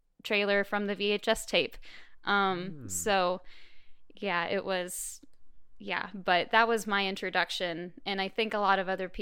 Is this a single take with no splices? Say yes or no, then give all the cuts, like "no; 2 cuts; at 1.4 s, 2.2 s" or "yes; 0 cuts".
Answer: yes; 0 cuts